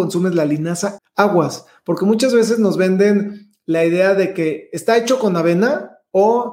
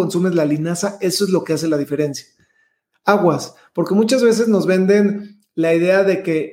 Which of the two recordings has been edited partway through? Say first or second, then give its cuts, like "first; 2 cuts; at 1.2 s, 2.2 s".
first; 1 cut; at 1.0 s